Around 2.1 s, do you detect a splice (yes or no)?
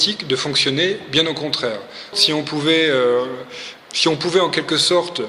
yes